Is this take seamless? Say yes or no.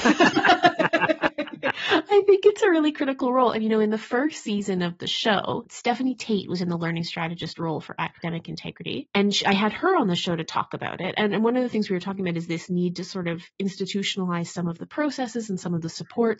yes